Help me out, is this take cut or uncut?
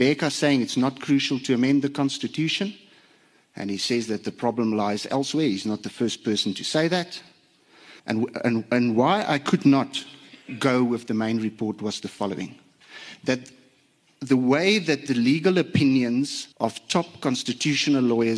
cut